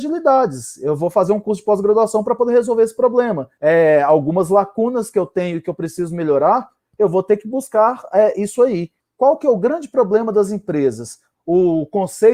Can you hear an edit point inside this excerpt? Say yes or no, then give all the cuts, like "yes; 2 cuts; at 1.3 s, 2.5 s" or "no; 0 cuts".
yes; 3 cuts; at 3.6 s, 9.0 s, 11.3 s